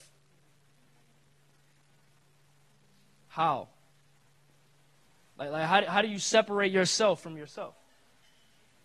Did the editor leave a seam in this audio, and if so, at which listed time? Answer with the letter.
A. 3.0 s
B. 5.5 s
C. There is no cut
C